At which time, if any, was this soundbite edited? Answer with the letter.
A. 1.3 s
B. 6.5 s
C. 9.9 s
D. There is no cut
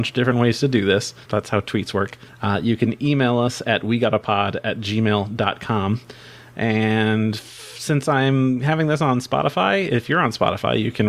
A